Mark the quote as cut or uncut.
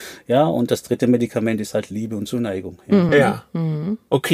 uncut